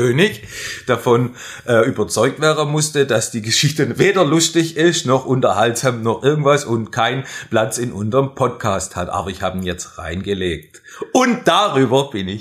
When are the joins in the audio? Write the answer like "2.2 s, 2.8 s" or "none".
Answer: none